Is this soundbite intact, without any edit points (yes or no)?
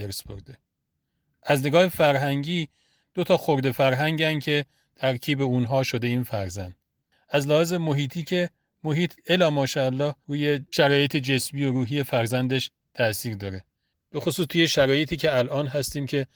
yes